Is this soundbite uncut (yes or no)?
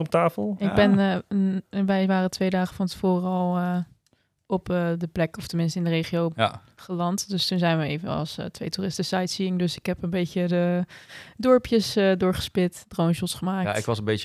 yes